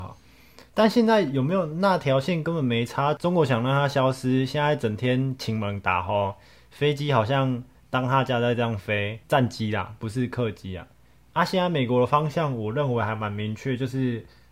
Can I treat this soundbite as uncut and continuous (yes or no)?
no